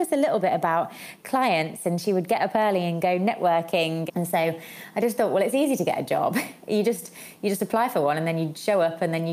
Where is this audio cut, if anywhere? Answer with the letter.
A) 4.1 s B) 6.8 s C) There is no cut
A